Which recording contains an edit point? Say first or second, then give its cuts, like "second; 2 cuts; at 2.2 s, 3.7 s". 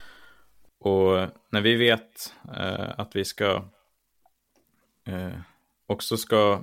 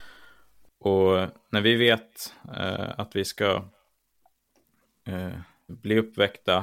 second; 1 cut; at 5.7 s